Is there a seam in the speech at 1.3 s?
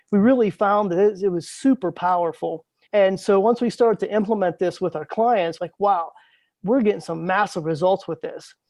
no; 2 cuts; at 2.9 s, 5.6 s

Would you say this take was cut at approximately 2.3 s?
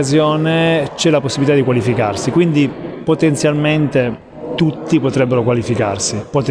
no; 0 cuts

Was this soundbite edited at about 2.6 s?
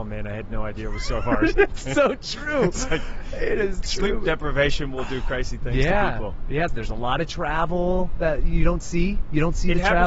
no; 1 cut; at 6.7 s

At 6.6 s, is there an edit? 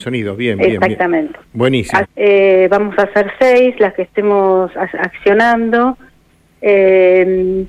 no; 1 cut; at 2.0 s

